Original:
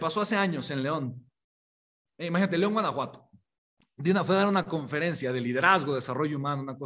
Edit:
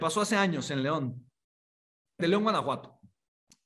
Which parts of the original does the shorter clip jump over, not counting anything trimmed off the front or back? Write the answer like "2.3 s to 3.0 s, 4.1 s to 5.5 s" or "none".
2.2 s to 2.5 s